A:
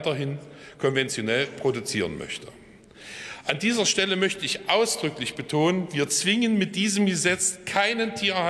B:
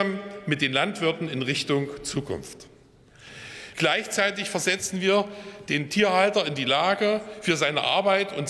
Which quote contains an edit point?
B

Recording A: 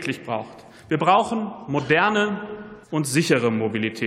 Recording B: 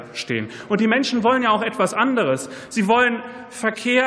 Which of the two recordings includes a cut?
A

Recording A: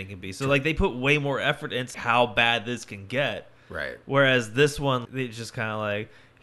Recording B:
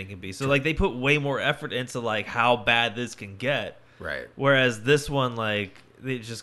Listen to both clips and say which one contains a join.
A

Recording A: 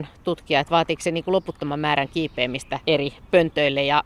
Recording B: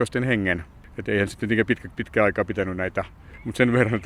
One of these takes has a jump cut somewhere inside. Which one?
A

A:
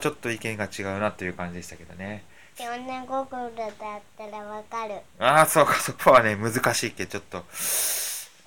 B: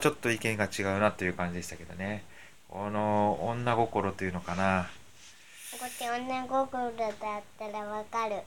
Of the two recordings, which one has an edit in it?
A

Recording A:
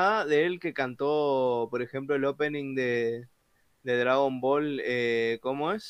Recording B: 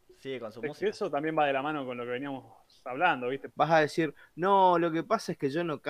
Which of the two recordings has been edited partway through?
B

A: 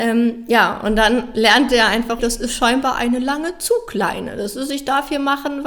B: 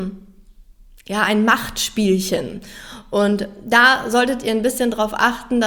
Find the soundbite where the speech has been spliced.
A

